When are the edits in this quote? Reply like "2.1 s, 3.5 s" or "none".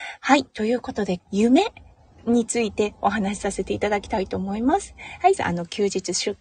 1.2 s, 5.4 s